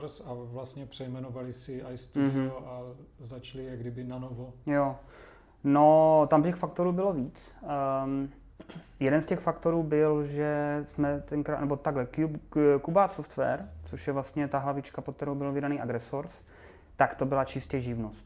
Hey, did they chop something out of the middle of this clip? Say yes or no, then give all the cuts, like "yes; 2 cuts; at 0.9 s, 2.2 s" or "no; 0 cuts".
no; 0 cuts